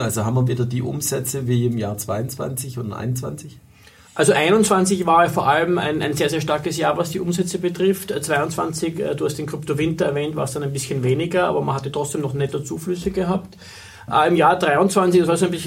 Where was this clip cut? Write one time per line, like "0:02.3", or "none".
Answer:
none